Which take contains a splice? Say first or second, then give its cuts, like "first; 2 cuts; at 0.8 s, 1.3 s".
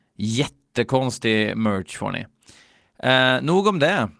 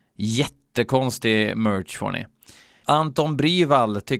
second; 1 cut; at 2.8 s